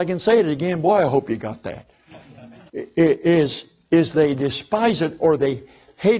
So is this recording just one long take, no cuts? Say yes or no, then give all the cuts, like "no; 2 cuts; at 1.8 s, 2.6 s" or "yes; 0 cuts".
no; 1 cut; at 2.7 s